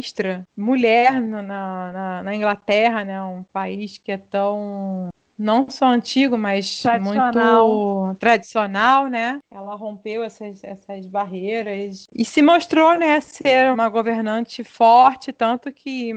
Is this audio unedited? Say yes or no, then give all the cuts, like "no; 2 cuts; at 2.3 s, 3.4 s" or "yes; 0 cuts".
no; 1 cut; at 13.7 s